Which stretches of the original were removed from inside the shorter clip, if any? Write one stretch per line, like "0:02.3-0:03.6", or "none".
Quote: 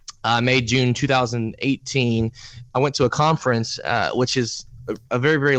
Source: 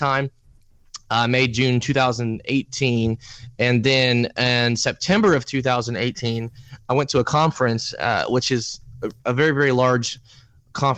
0:03.6-0:06.8